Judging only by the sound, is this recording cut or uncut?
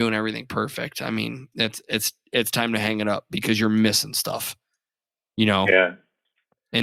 uncut